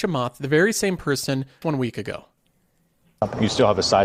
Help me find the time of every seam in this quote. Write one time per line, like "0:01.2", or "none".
0:01.6